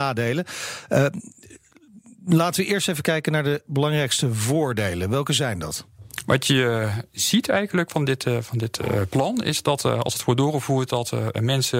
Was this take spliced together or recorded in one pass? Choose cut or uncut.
uncut